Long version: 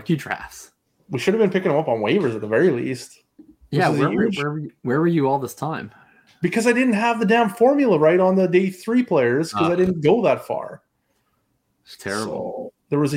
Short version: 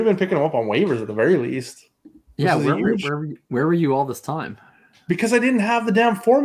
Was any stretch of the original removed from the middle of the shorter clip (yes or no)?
no